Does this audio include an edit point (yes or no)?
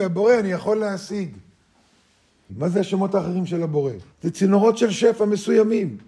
yes